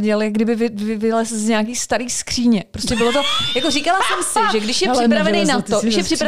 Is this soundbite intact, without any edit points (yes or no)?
yes